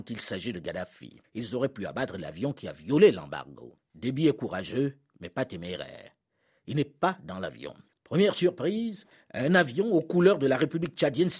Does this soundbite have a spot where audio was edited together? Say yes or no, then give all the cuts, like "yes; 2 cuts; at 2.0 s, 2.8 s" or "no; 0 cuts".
yes; 1 cut; at 7.9 s